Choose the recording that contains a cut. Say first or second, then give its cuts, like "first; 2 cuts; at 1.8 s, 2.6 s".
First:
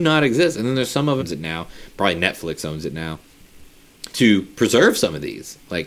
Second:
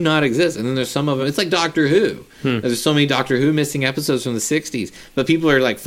first; 2 cuts; at 1.2 s, 4.1 s